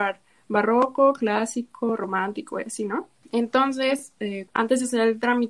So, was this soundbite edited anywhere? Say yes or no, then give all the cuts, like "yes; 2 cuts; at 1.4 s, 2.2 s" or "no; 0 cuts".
yes; 2 cuts; at 3.2 s, 4.5 s